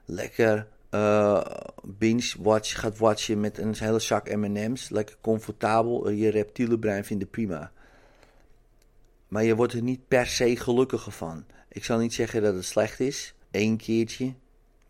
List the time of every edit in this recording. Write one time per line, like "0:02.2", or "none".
0:13.4